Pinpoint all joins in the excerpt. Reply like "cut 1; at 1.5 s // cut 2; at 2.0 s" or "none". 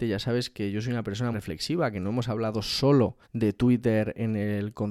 cut 1; at 1.3 s // cut 2; at 3.2 s